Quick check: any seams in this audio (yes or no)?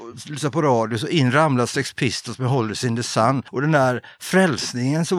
no